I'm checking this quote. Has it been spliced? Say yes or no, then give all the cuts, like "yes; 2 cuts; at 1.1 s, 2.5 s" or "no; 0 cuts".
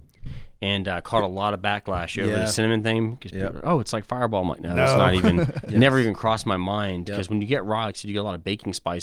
no; 0 cuts